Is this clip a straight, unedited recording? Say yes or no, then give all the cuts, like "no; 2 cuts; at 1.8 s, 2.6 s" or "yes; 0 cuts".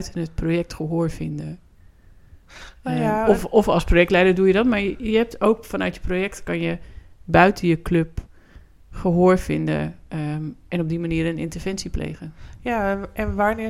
yes; 0 cuts